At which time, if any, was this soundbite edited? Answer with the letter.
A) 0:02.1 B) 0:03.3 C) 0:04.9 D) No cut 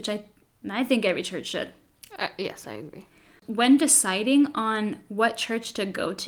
D